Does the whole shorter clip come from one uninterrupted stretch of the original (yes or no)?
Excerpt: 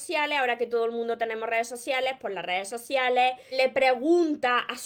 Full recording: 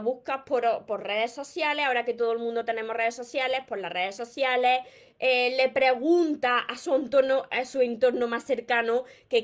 no